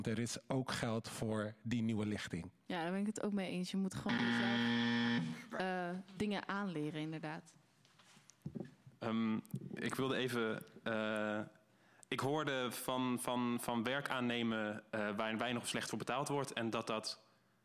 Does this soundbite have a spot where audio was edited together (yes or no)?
no